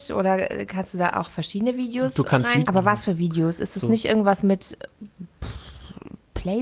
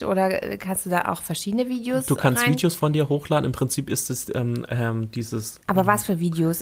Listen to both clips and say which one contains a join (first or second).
first